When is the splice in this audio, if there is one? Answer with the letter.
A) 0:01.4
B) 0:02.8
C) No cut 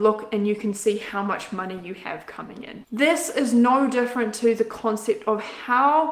B